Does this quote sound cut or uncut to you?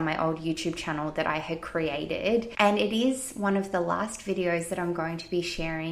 cut